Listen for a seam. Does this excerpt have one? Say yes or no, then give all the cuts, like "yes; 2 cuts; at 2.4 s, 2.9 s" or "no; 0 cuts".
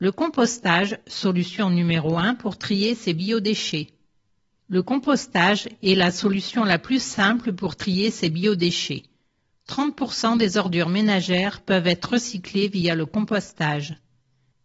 no; 0 cuts